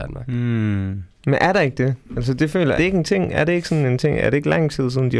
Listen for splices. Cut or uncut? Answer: cut